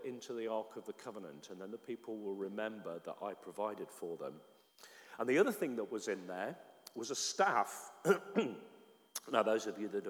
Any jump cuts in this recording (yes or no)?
no